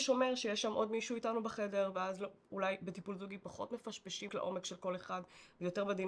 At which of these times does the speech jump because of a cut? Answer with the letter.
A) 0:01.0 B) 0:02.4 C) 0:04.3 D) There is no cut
C